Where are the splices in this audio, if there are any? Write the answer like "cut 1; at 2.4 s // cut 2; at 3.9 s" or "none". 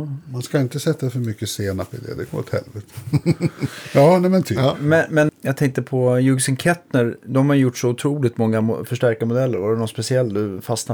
cut 1; at 5.3 s